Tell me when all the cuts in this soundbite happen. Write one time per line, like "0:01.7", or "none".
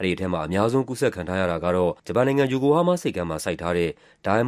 0:02.0